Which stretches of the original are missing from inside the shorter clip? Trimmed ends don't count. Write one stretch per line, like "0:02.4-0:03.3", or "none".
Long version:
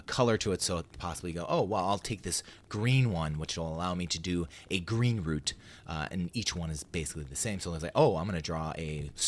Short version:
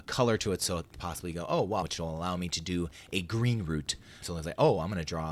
0:01.8-0:03.4
0:05.8-0:07.6